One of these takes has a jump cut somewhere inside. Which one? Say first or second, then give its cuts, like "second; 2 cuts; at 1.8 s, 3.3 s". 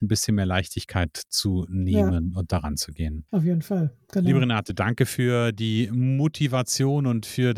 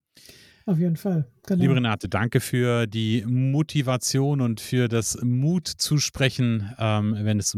first; 1 cut; at 3.3 s